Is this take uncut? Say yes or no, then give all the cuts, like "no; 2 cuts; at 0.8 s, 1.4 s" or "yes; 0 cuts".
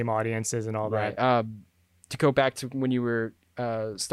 no; 1 cut; at 1.2 s